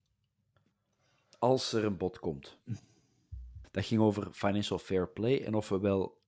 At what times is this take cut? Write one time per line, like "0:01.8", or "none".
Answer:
0:03.6